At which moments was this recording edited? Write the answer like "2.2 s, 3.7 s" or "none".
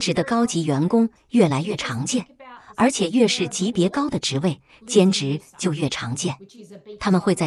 none